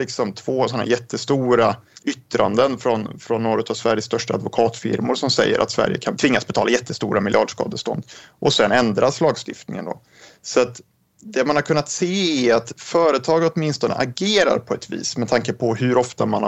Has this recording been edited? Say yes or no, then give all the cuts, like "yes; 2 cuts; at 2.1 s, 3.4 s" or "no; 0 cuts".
no; 0 cuts